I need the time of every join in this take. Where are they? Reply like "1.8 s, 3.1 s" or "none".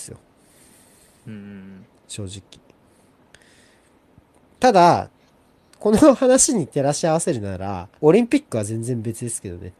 7.9 s